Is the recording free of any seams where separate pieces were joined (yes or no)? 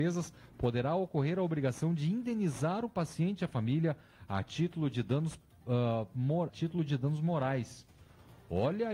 no